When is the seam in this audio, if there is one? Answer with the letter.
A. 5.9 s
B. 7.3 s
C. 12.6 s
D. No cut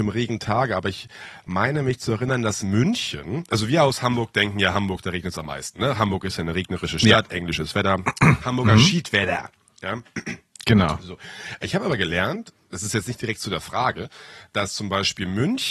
D